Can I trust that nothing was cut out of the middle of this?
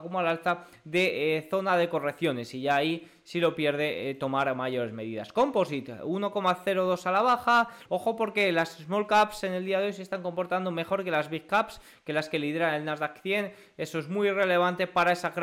no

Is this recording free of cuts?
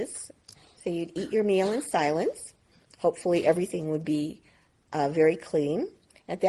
no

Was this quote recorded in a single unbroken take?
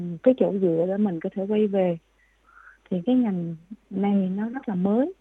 yes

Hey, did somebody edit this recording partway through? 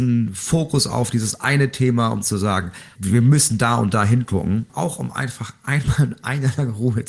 yes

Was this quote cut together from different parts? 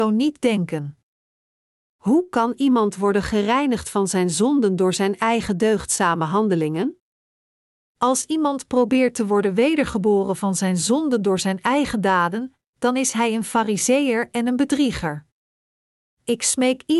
no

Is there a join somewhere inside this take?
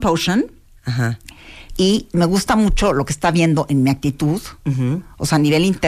yes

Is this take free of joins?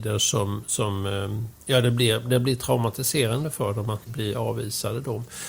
no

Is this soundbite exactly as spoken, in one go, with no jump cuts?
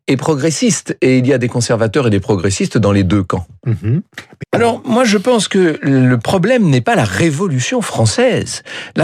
no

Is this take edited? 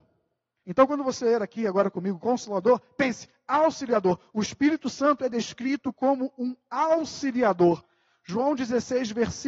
no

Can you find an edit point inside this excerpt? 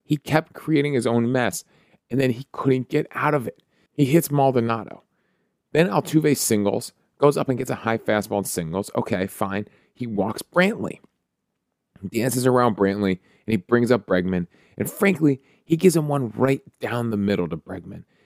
yes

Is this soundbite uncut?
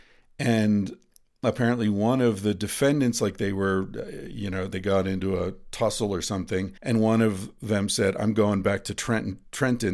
no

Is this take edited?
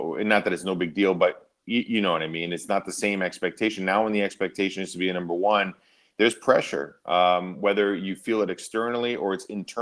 no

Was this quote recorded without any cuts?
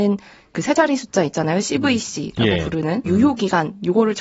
no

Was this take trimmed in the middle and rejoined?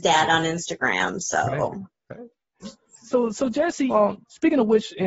yes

